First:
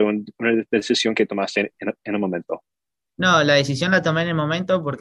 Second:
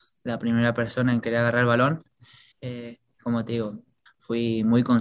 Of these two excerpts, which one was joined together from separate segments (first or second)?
second